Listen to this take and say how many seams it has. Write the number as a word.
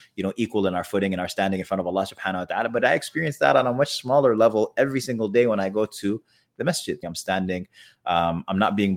one